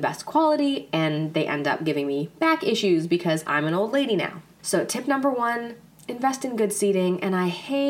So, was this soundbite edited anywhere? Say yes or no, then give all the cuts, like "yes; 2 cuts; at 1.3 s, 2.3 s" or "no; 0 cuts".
yes; 1 cut; at 4.6 s